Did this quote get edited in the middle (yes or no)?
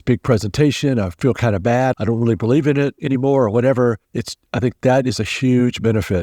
yes